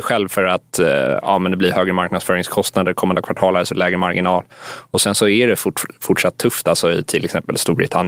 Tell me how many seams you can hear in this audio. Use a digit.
0